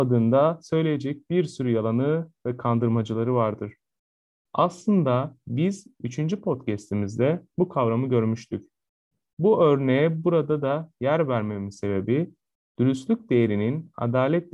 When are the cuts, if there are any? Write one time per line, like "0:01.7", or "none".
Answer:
0:04.4